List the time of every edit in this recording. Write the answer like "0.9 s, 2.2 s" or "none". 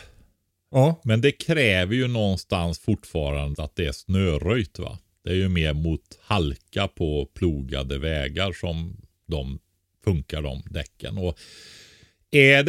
3.5 s